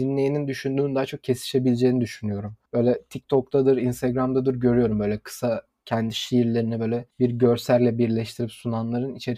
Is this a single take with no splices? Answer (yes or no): no